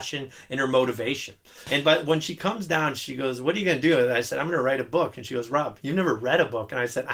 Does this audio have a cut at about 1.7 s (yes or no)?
yes